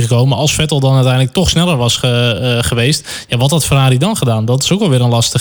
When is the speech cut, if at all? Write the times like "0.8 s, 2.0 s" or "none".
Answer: none